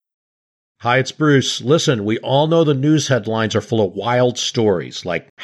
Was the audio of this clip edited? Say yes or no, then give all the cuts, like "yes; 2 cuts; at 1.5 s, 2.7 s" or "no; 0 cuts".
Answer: no; 0 cuts